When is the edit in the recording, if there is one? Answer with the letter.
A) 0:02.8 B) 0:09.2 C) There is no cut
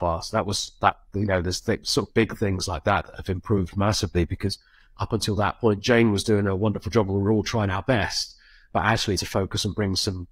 B